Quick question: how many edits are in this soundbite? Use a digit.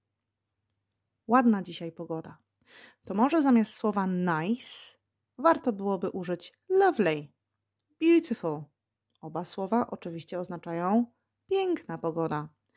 0